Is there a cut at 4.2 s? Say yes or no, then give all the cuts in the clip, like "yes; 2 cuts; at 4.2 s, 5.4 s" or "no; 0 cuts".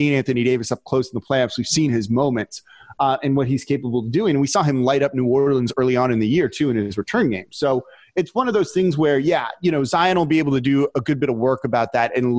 no; 0 cuts